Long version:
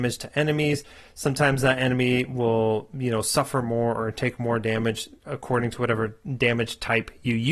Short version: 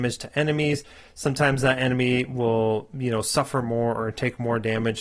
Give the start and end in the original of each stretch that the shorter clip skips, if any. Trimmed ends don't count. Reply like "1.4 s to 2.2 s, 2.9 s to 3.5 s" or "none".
none